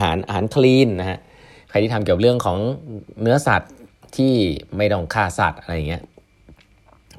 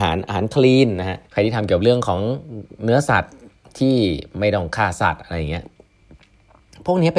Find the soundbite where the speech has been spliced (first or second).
second